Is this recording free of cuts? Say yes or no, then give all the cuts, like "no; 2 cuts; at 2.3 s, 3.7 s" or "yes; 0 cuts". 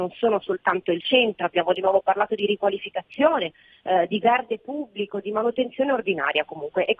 yes; 0 cuts